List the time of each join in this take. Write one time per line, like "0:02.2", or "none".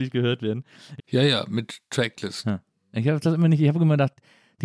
0:01.0